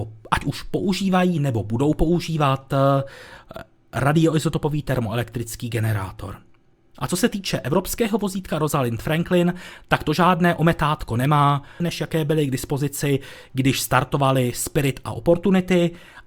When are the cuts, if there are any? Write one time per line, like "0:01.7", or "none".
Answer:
0:11.8